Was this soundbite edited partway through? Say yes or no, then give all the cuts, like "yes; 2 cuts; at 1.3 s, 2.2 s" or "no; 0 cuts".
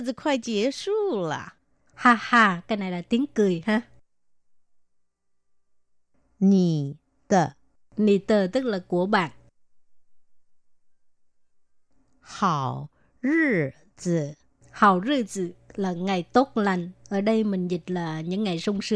yes; 1 cut; at 1.9 s